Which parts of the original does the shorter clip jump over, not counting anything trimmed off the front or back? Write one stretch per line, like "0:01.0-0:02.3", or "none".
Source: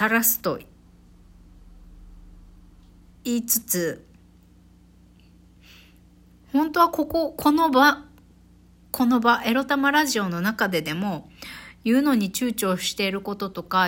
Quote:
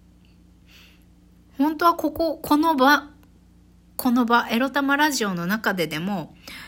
none